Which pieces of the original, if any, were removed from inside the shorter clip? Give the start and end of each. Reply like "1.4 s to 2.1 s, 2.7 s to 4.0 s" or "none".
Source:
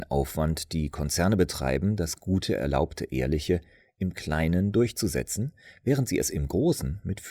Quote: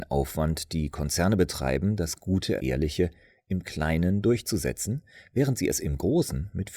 2.6 s to 3.1 s